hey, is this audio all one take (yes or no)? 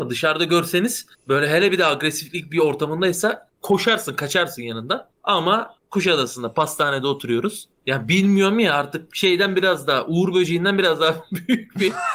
yes